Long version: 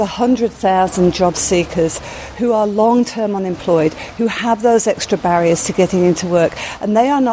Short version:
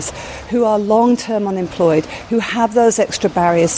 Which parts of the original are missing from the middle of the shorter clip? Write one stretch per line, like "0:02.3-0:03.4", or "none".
none